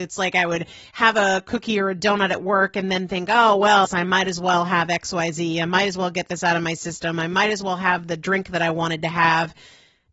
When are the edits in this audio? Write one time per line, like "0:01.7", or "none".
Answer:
0:03.8